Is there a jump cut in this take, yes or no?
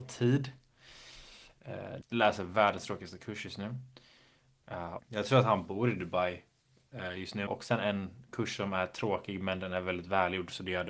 yes